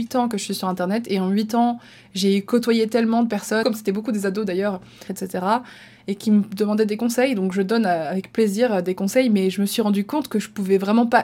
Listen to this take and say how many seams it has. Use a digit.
2